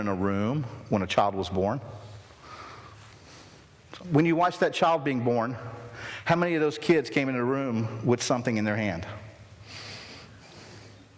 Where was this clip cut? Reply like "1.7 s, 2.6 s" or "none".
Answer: 4.0 s